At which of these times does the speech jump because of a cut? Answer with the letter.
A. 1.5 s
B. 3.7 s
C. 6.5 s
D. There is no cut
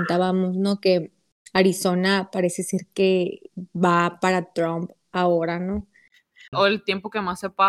C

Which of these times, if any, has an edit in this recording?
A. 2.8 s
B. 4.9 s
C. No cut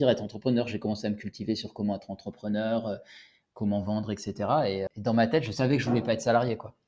B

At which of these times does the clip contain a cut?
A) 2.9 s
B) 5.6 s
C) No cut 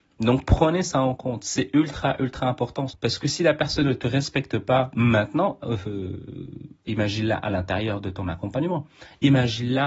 A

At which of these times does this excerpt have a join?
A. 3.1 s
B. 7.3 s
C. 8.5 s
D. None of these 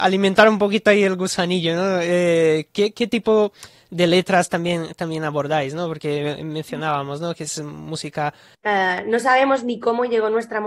C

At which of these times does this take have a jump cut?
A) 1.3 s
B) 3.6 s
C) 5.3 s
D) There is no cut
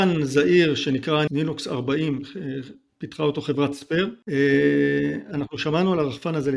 A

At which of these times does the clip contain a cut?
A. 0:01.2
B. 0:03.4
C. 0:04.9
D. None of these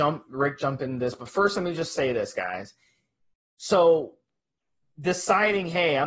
B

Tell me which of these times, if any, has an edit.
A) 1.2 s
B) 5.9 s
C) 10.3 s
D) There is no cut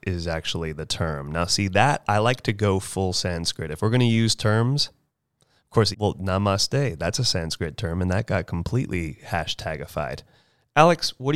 B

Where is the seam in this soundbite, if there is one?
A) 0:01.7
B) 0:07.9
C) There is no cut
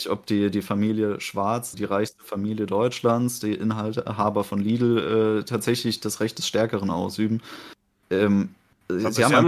A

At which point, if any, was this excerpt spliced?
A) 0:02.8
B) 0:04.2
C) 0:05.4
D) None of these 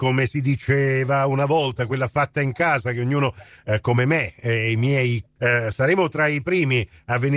C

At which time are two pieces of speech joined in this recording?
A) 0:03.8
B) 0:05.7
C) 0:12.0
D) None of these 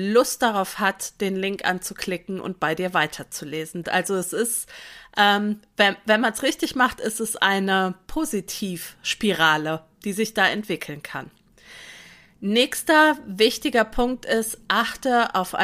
A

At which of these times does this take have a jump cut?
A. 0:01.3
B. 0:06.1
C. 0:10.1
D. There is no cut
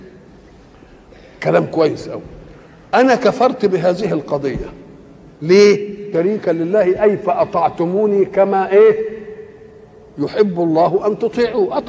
B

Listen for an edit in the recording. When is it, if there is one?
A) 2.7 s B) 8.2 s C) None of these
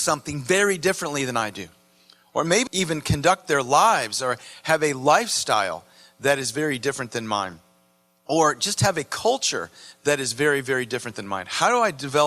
A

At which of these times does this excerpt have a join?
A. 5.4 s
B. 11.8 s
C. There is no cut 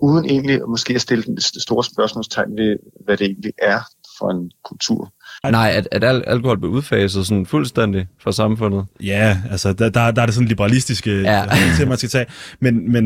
A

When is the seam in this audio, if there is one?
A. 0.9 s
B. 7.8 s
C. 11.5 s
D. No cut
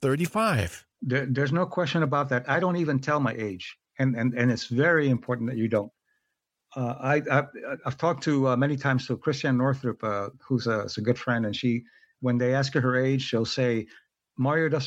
A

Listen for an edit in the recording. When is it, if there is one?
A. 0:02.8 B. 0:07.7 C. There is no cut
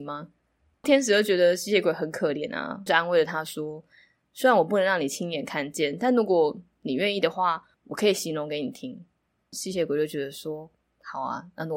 B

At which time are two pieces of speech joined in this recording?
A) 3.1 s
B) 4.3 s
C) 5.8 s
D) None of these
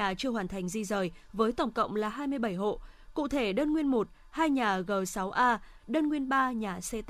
C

